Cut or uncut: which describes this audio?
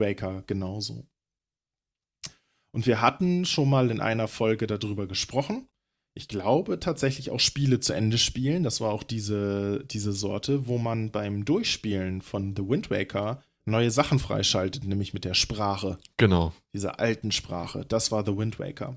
uncut